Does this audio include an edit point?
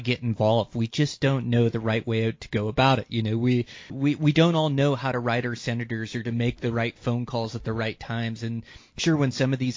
yes; 1 cut; at 3.9 s

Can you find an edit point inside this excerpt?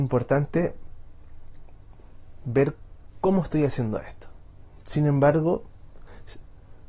yes; 1 cut; at 4.8 s

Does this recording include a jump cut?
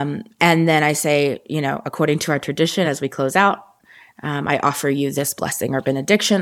no; 0 cuts

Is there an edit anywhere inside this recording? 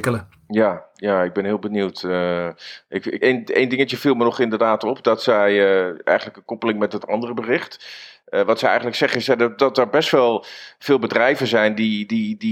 yes; 1 cut; at 3.2 s

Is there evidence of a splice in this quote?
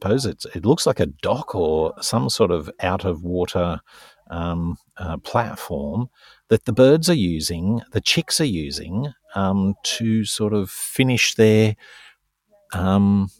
no; 0 cuts

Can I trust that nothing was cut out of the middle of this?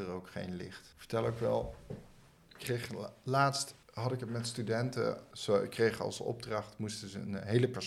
yes; 0 cuts

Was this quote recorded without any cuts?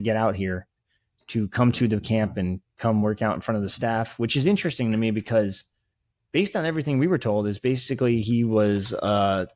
yes; 0 cuts

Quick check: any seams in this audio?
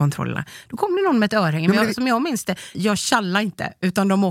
yes; 1 cut; at 2.7 s

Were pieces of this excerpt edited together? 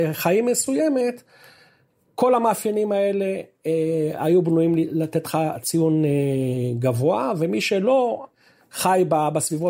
no; 0 cuts

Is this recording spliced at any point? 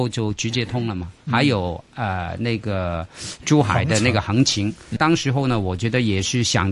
yes; 2 cuts; at 1.2 s, 5.0 s

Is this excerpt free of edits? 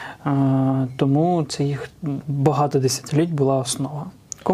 yes; 0 cuts

